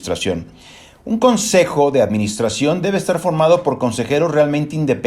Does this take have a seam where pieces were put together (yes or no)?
no